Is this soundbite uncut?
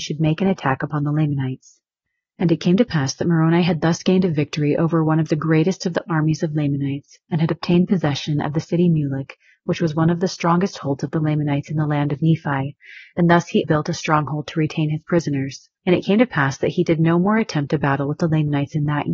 no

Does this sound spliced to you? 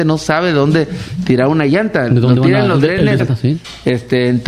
yes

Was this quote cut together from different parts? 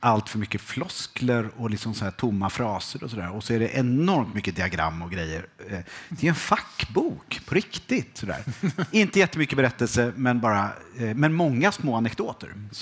no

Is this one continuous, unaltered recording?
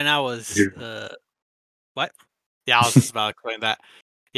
no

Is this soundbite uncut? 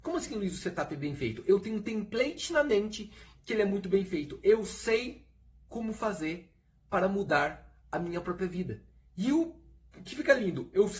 yes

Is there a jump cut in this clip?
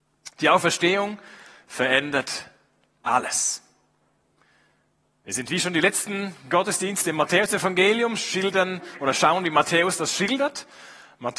no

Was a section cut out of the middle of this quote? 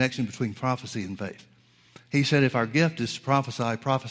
no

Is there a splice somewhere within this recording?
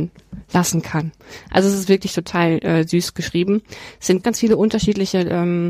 yes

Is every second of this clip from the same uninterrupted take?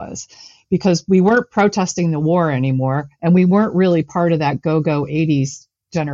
yes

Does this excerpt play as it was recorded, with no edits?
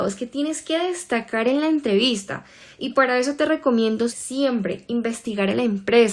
no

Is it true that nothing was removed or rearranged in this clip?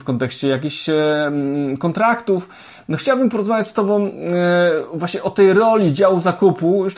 yes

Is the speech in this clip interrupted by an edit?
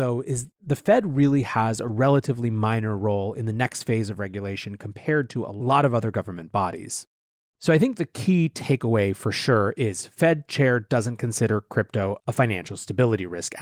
yes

